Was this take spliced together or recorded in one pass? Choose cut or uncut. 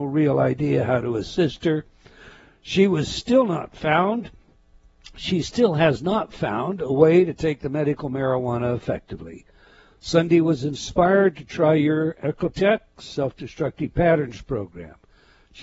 uncut